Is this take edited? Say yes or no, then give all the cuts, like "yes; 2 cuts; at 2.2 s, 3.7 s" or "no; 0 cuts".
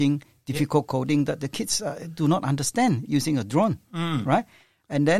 no; 0 cuts